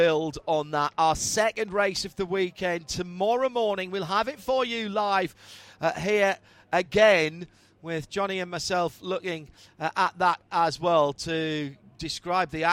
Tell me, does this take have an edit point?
no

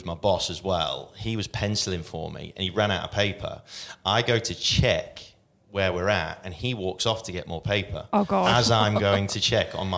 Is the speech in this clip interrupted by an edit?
no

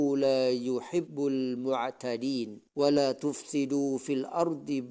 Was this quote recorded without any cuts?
no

